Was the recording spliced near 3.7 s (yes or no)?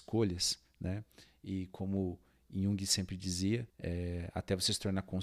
yes